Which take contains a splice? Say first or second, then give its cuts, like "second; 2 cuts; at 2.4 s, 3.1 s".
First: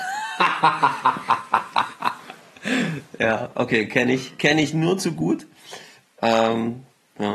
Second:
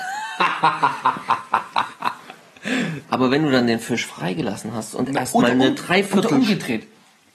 second; 1 cut; at 3.0 s